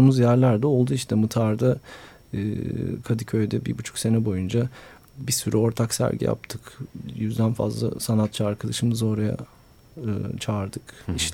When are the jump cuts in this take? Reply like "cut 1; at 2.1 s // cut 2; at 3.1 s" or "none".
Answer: none